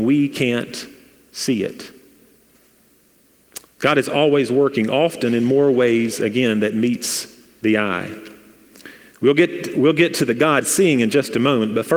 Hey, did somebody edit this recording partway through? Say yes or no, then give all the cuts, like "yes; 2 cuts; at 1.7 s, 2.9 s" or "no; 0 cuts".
no; 0 cuts